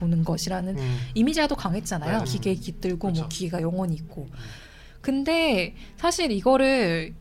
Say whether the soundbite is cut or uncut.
cut